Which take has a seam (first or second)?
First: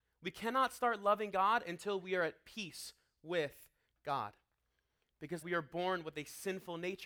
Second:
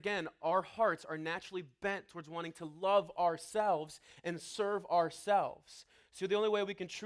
first